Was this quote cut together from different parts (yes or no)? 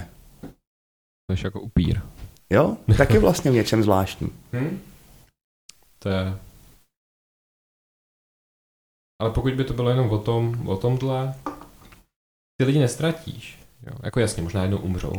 no